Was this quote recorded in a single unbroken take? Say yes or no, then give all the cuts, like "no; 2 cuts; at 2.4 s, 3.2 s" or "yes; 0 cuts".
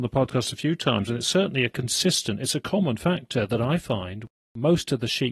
yes; 0 cuts